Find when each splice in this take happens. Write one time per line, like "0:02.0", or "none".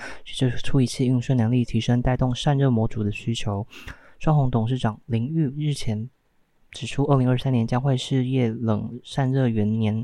none